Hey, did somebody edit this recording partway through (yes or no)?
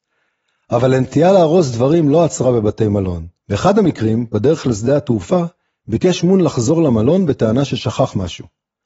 yes